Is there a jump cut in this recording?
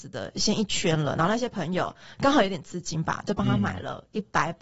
no; 0 cuts

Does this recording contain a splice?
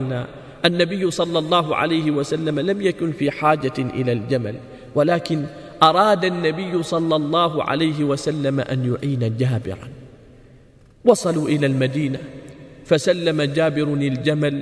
no; 0 cuts

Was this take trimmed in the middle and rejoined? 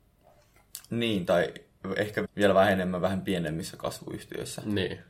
yes; 1 cut; at 2.3 s

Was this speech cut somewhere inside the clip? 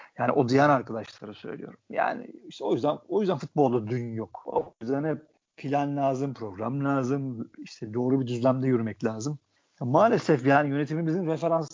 no; 0 cuts

